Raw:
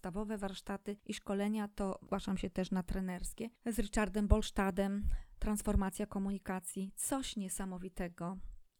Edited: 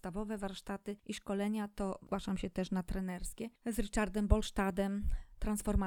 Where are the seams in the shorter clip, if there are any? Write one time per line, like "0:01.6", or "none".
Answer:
none